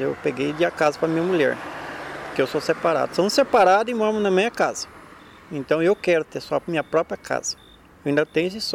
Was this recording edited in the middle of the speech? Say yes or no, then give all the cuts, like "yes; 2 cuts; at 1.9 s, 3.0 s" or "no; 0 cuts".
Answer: no; 0 cuts